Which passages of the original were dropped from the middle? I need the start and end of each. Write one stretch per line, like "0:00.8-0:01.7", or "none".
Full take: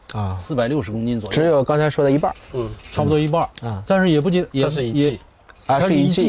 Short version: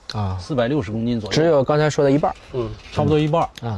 none